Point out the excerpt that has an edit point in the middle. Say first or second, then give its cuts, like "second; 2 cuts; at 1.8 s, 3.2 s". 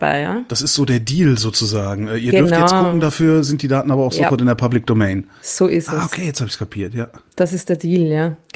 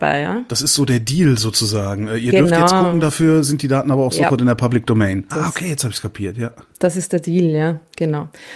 second; 1 cut; at 5.3 s